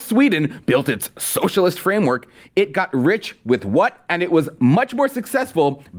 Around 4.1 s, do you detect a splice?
yes; 1 cut; at 4.1 s

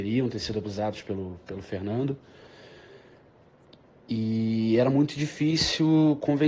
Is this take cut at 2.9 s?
no; 0 cuts

